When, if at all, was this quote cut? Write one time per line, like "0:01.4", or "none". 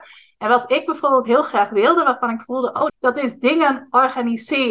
0:02.9